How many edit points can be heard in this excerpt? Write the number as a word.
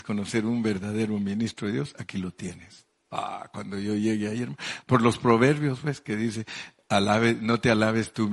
one